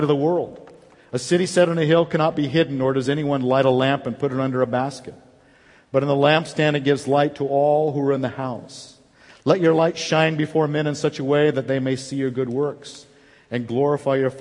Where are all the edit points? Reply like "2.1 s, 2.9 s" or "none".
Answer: none